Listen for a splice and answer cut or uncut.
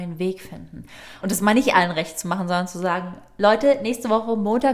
cut